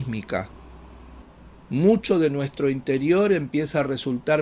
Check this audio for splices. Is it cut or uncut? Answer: uncut